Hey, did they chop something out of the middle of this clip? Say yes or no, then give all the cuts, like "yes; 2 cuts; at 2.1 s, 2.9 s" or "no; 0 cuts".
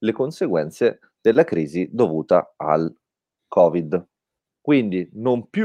yes; 1 cut; at 4.5 s